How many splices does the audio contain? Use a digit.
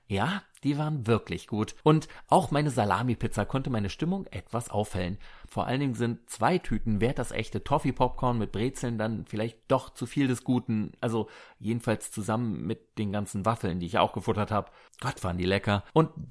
1